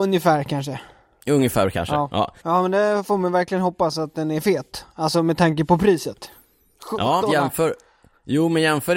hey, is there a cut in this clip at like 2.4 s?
yes; 2 cuts; at 2.4 s, 7.2 s

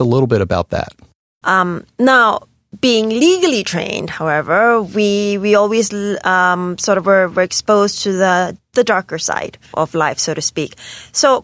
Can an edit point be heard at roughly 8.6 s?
yes; 3 cuts; at 1.4 s, 8.6 s, 9.7 s

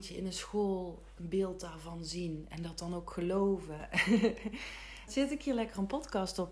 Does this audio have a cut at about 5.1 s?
yes; 1 cut; at 5.1 s

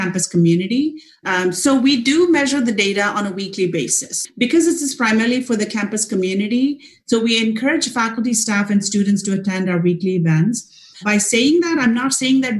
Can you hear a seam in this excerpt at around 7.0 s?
no; 2 cuts; at 1.2 s, 10.9 s

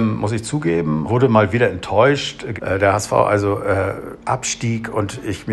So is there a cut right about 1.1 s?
yes; 2 cuts; at 1.1 s, 2.6 s

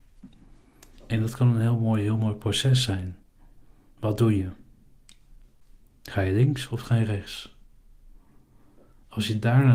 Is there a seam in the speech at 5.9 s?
no; 0 cuts

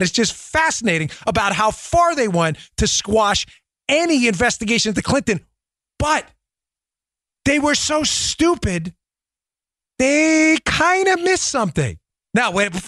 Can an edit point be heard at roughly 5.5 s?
no; 0 cuts

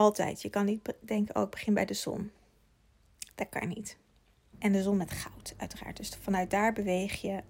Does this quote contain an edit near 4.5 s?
yes; 1 cut; at 4.5 s

